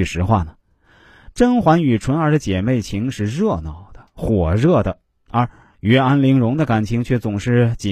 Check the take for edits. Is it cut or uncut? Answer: uncut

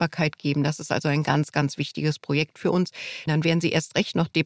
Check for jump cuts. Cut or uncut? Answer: cut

